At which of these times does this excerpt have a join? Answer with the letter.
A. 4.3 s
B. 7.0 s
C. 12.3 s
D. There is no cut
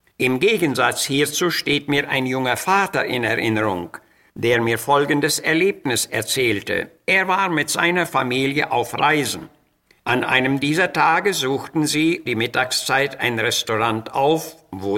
C